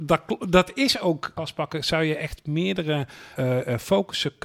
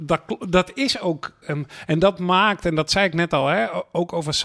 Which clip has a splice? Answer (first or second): first